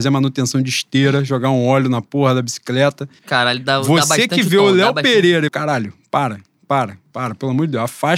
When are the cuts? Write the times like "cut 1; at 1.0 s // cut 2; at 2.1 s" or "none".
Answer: cut 1; at 3.2 s // cut 2; at 5.5 s